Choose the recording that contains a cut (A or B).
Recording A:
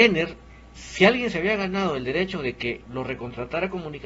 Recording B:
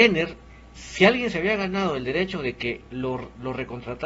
A